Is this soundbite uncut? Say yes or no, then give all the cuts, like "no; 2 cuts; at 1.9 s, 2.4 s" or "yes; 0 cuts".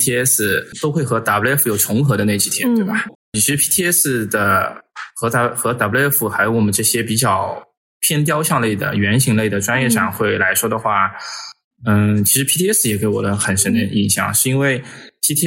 no; 1 cut; at 3.1 s